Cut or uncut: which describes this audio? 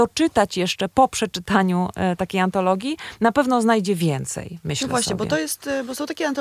uncut